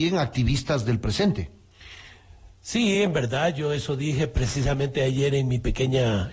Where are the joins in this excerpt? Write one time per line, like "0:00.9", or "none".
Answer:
none